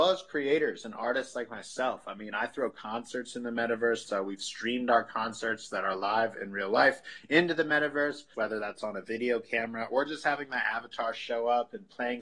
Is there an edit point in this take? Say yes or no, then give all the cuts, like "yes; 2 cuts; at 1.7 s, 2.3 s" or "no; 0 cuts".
yes; 2 cuts; at 4.0 s, 8.3 s